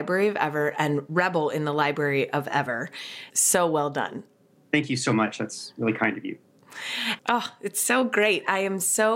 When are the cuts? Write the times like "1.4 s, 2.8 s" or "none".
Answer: 3.3 s, 7.2 s